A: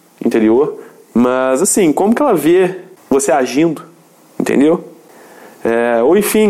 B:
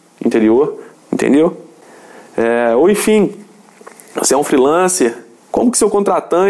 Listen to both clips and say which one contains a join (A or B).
B